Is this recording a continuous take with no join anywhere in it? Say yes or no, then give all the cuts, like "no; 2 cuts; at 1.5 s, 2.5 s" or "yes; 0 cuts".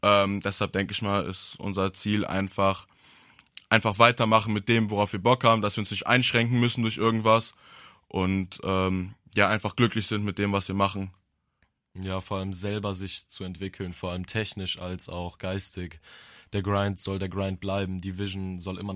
yes; 0 cuts